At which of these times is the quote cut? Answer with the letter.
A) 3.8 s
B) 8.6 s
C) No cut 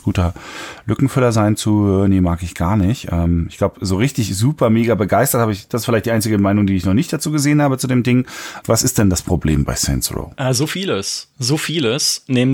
B